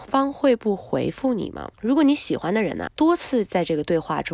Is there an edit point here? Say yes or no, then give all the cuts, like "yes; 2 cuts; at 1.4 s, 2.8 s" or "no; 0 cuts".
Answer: yes; 2 cuts; at 1.7 s, 2.9 s